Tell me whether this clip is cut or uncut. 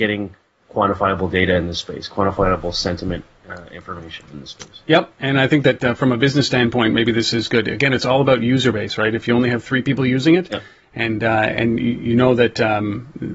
cut